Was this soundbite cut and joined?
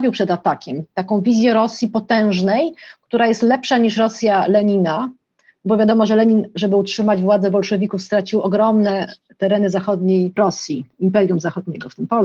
no; 0 cuts

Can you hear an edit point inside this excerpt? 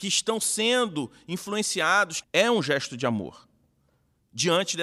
yes; 1 cut; at 2.2 s

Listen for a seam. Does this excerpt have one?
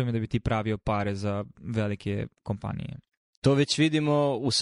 no; 0 cuts

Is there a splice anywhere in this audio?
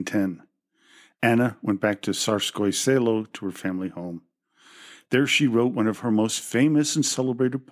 no; 0 cuts

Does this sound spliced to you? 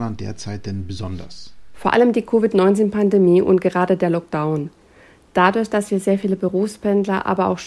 no; 0 cuts

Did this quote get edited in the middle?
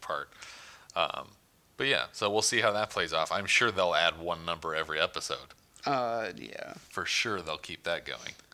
no; 0 cuts

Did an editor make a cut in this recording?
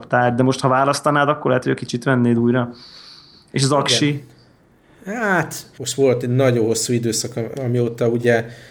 yes; 2 cuts; at 5.8 s, 7.6 s

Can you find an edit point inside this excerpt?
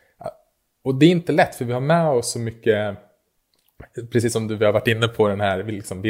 no; 0 cuts

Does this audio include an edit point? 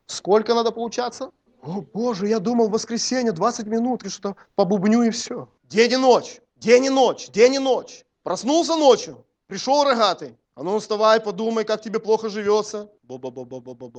yes; 1 cut; at 4.0 s

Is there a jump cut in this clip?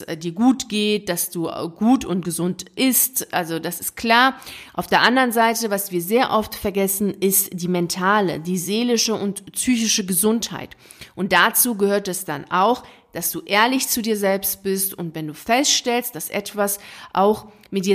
no; 0 cuts

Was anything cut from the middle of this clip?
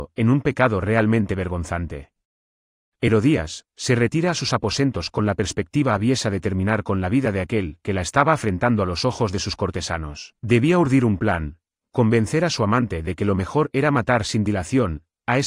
yes; 2 cuts; at 3.7 s, 10.4 s

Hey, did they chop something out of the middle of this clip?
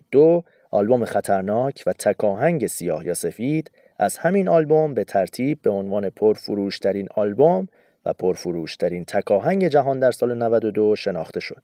no; 0 cuts

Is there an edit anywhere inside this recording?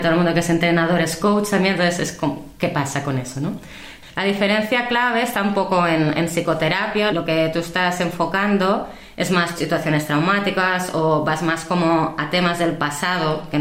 yes; 2 cuts; at 7.1 s, 9.6 s

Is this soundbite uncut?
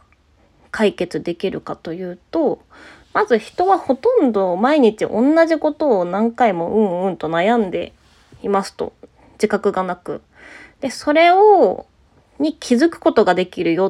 yes; 0 cuts

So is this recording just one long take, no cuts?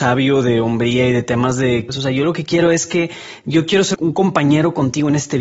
no; 2 cuts; at 1.9 s, 3.9 s

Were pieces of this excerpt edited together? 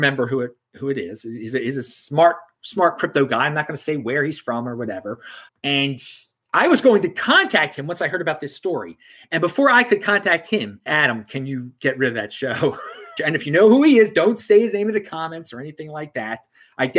yes; 3 cuts; at 5.5 s, 10.9 s, 13.2 s

